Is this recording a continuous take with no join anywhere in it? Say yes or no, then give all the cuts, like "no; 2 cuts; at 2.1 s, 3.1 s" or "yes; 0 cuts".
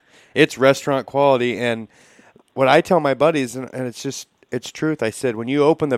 yes; 0 cuts